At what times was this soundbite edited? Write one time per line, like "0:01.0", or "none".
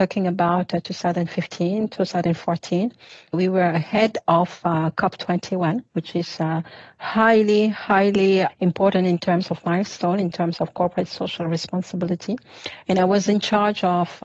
0:12.8